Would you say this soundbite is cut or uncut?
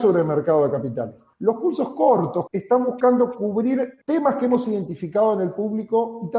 cut